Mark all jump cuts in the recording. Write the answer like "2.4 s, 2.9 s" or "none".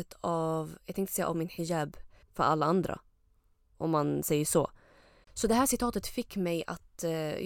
2.2 s, 5.2 s